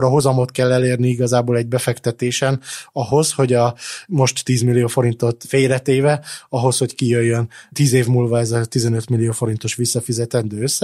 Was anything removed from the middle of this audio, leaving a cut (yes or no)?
no